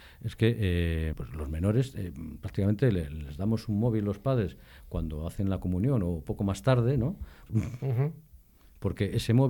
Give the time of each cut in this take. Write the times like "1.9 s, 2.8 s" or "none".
1.1 s, 7.5 s